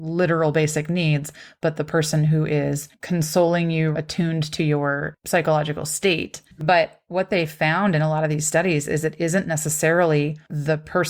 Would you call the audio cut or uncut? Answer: cut